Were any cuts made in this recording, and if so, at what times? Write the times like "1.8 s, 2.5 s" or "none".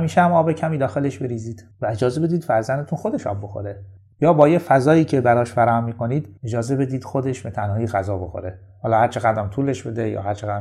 6.4 s